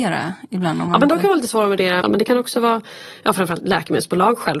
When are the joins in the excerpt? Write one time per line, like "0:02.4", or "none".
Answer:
0:02.0